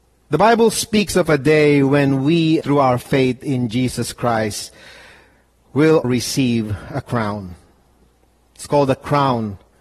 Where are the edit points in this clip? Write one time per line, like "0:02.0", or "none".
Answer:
0:02.6
0:06.0